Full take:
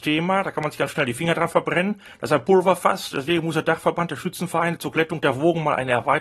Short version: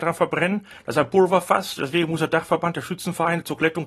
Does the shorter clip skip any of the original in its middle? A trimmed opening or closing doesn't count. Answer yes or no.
no